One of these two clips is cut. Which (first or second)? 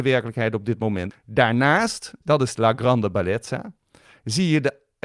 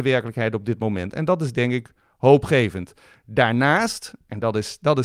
first